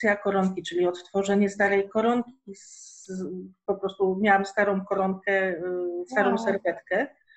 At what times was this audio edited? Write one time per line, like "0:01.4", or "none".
none